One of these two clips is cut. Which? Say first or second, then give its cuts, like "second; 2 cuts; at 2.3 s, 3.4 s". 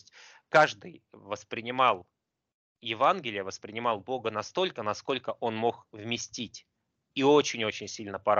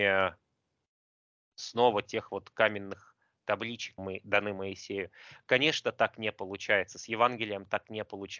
second; 1 cut; at 4.0 s